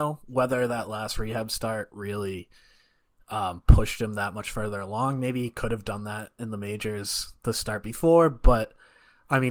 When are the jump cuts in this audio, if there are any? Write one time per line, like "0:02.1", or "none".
none